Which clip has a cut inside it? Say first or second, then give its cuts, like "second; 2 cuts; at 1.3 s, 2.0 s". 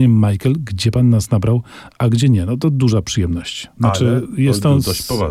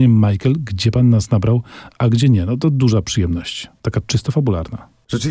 first; 1 cut; at 3.7 s